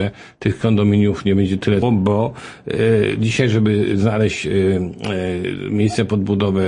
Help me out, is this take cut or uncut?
cut